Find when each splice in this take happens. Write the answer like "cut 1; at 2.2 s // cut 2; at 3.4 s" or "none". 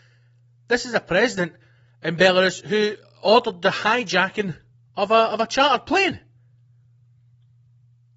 none